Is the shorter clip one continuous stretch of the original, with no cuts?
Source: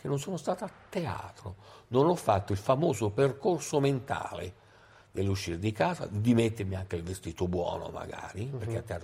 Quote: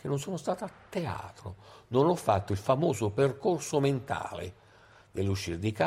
yes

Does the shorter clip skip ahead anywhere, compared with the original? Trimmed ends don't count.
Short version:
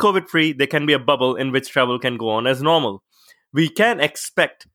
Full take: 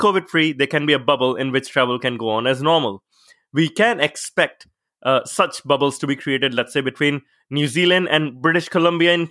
no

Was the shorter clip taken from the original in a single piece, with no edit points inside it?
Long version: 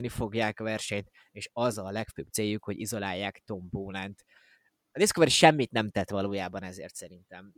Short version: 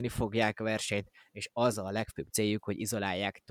yes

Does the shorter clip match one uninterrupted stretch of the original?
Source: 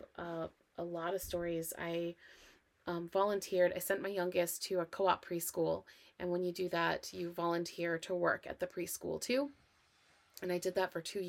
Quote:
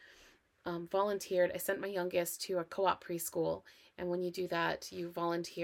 yes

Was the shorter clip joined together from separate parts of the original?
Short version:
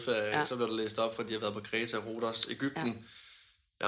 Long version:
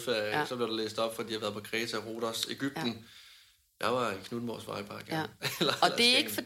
no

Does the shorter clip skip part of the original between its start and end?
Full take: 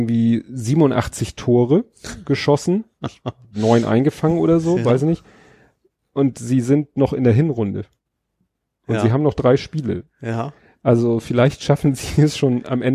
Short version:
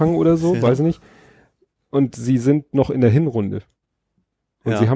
no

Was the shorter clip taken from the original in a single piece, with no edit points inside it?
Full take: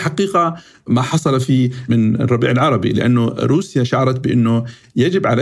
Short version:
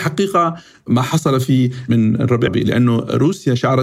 no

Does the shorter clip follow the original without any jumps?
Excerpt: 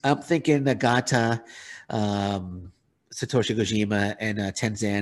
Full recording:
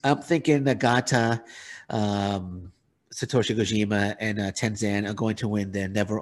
yes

